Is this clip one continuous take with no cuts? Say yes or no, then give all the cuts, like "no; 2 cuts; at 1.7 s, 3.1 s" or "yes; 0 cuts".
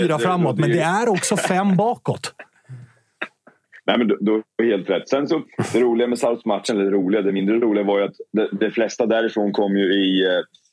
yes; 0 cuts